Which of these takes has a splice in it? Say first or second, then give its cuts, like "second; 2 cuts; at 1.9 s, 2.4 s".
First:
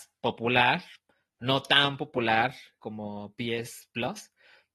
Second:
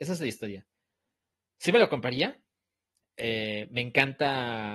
first; 1 cut; at 2.8 s